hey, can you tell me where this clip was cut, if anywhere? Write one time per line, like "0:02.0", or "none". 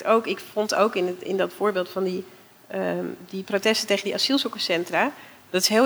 0:02.6